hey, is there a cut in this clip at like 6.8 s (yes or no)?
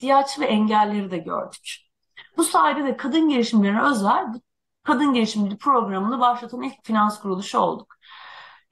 yes